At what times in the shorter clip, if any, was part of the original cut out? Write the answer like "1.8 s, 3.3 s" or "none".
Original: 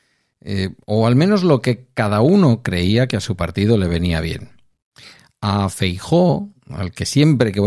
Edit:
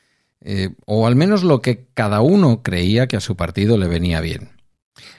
none